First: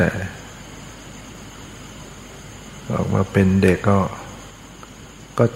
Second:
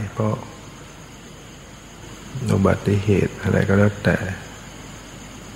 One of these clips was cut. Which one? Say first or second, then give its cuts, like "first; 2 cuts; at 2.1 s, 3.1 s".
first; 1 cut; at 3.8 s